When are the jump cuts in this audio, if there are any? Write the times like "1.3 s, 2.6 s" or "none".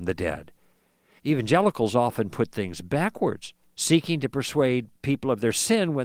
1.2 s, 3.6 s

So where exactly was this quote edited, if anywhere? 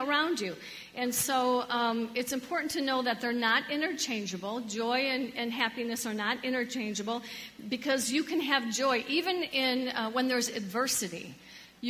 none

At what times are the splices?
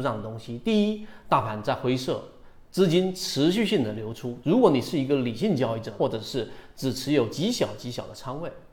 4.4 s, 6.0 s

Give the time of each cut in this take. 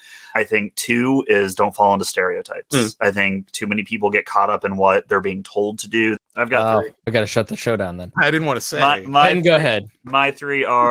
6.2 s, 8.1 s

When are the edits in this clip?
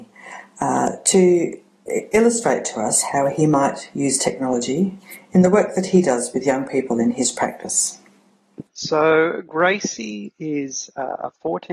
none

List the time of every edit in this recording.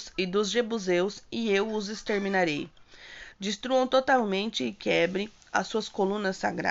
3.3 s

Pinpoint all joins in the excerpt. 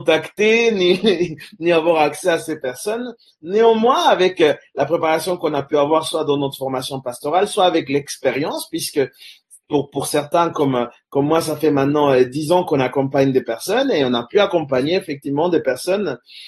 none

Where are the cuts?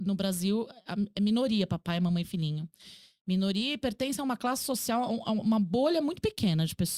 none

